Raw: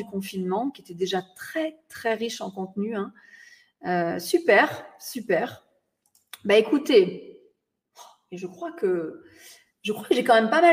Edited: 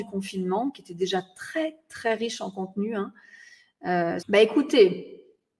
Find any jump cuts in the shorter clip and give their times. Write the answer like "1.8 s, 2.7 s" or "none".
4.2 s

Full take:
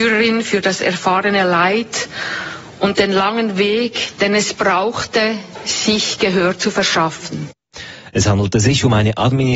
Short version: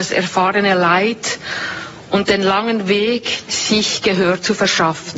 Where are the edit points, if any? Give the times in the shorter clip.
3.5 s

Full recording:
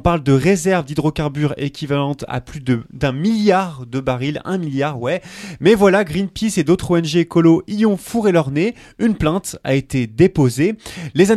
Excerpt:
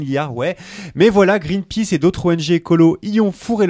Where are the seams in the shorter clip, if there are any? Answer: none

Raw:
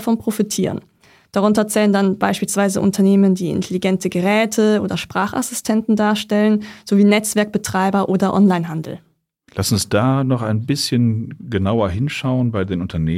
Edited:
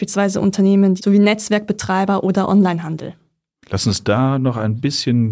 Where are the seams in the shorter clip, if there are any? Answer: 1.0 s

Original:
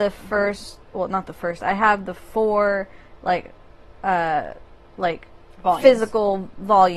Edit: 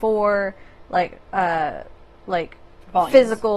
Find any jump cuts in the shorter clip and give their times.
1.2 s

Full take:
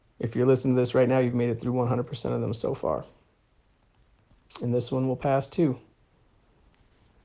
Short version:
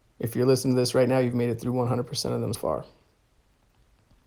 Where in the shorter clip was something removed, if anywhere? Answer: 2.5 s

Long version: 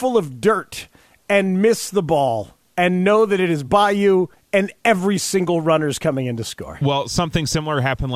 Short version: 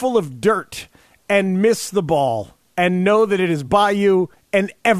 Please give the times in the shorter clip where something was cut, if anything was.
none

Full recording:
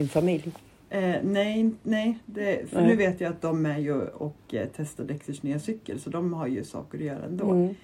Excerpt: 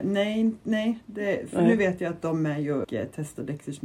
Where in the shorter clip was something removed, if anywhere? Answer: 2.8 s

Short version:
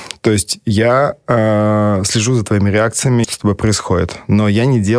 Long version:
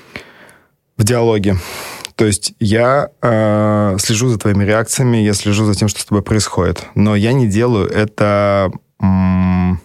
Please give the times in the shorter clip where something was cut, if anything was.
3.2 s

